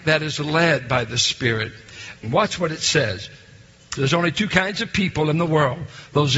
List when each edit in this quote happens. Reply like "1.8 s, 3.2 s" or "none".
2.2 s, 4.0 s